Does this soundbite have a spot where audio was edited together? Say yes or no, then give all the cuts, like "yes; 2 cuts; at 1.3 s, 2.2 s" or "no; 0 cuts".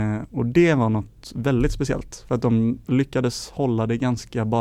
yes; 1 cut; at 2.8 s